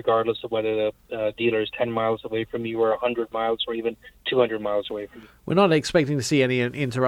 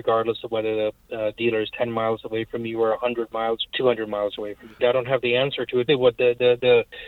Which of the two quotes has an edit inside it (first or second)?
second